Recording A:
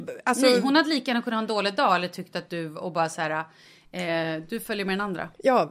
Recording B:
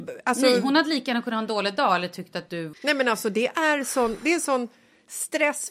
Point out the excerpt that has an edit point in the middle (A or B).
B